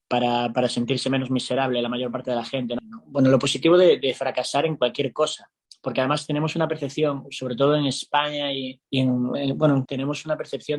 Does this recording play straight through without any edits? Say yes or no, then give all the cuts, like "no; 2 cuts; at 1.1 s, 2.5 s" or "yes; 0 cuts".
no; 3 cuts; at 2.8 s, 8.8 s, 9.9 s